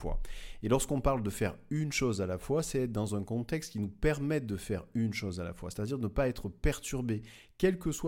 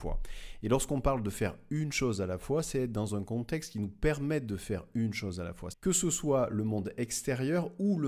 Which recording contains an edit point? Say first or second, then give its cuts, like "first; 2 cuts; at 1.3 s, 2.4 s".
second; 1 cut; at 5.7 s